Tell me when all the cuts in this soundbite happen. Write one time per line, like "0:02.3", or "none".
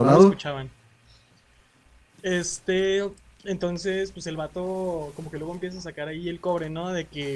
none